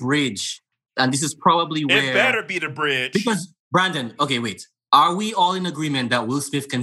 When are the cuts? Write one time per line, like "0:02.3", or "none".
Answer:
0:04.2